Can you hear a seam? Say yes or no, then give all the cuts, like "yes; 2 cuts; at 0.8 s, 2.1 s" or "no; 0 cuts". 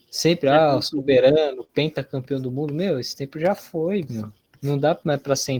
no; 0 cuts